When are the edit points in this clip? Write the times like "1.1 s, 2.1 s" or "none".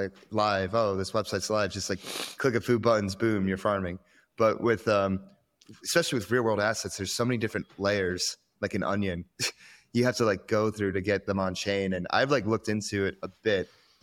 none